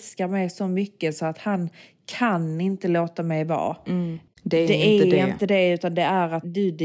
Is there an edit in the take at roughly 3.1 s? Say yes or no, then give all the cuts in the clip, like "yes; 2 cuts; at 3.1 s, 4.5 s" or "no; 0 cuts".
no; 1 cut; at 4.3 s